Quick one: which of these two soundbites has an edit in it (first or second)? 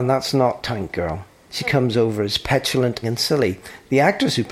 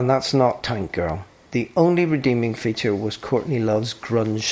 first